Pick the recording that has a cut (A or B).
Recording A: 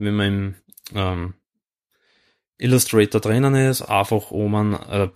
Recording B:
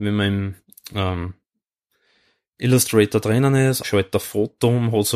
B